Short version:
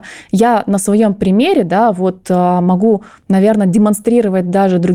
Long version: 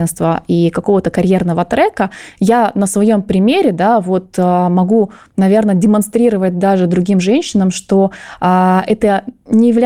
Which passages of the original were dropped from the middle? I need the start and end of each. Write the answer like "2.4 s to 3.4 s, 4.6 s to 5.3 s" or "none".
none